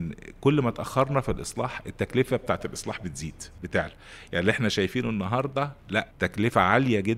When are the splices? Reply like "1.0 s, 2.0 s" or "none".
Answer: 6.1 s